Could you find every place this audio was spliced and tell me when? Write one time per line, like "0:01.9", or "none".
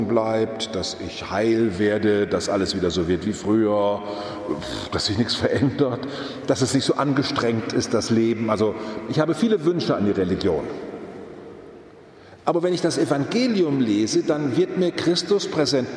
none